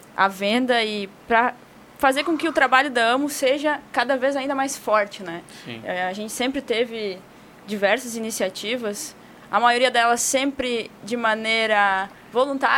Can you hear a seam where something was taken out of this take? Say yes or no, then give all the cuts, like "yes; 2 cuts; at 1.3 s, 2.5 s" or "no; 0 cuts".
no; 0 cuts